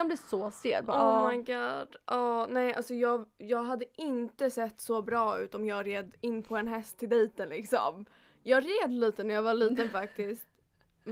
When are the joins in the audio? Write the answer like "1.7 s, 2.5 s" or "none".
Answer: none